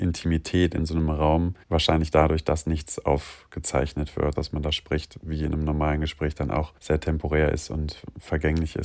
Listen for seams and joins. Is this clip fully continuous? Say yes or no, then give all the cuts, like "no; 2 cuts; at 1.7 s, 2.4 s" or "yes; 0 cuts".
no; 3 cuts; at 1.6 s, 4.4 s, 6.8 s